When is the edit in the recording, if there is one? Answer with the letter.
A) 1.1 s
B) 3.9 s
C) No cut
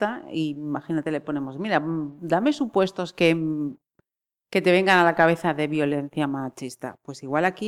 C